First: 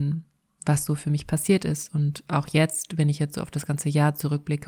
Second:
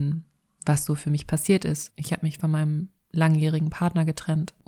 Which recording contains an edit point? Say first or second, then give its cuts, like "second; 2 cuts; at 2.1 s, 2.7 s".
second; 1 cut; at 1.9 s